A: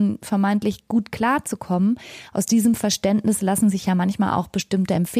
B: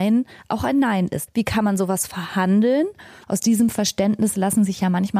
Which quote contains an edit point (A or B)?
B